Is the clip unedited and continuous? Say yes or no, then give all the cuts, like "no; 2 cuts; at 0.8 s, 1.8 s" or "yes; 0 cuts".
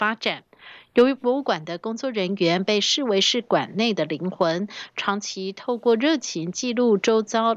yes; 0 cuts